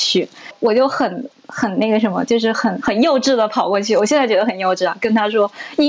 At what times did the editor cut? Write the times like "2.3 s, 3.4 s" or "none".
none

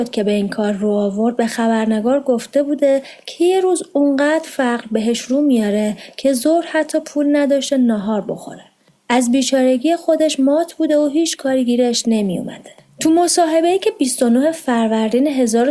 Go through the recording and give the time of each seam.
12.9 s

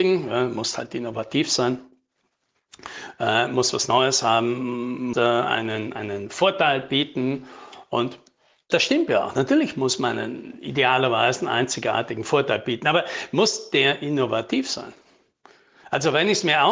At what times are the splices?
5.1 s, 8.7 s

